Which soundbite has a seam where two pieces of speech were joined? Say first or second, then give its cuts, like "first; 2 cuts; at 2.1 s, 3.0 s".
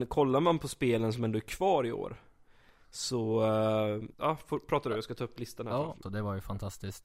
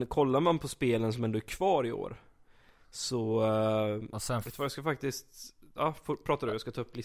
first; 2 cuts; at 4.1 s, 6.0 s